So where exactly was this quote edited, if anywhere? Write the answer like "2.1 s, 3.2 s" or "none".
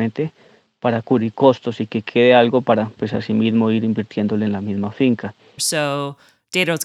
5.6 s

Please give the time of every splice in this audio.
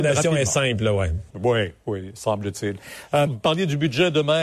1.3 s, 3.3 s

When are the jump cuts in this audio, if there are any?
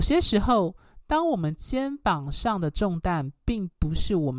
none

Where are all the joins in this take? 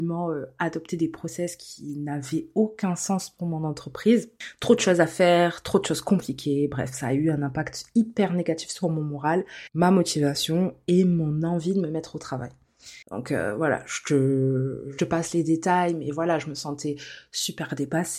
13.0 s, 15.0 s

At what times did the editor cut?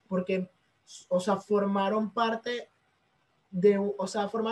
none

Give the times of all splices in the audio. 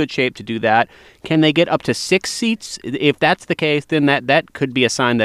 none

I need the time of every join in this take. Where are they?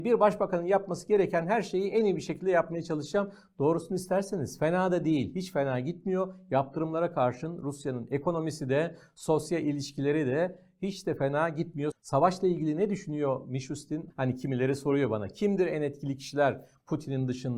11.9 s, 14.1 s

